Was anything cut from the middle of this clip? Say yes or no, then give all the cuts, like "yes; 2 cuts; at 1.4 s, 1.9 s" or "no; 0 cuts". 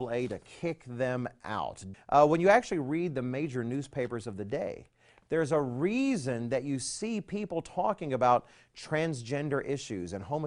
yes; 1 cut; at 1.9 s